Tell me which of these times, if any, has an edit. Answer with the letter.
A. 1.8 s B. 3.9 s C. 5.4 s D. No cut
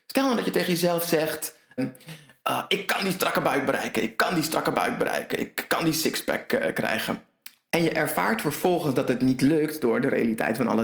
A